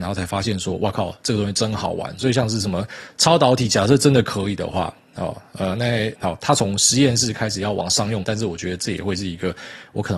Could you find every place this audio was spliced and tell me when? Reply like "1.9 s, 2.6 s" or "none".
2.2 s, 6.2 s, 8.2 s